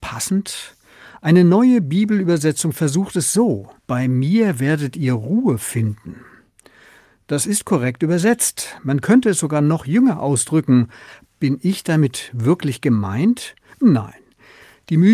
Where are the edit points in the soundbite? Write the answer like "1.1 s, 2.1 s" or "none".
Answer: 3.8 s, 11.2 s